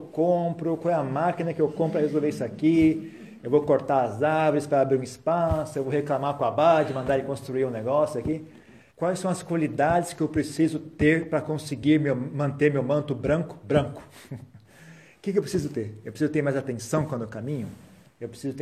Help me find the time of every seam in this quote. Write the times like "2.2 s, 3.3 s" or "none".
8.9 s